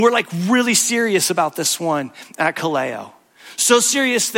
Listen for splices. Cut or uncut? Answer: uncut